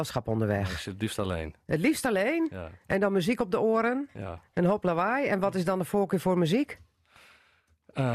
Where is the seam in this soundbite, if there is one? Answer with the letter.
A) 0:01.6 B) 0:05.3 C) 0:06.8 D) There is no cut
D